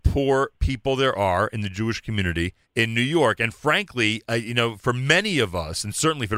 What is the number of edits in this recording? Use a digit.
1